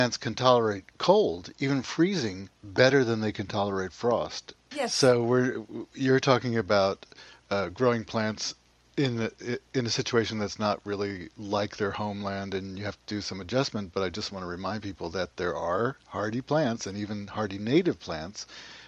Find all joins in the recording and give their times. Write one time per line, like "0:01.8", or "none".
0:04.7